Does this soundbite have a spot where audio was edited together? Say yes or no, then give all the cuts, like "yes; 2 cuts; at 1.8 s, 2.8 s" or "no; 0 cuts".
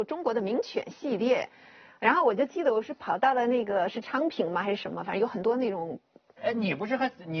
yes; 1 cut; at 6.4 s